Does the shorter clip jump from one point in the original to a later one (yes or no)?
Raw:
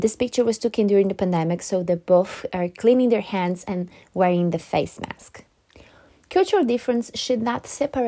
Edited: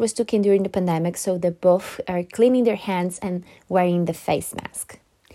no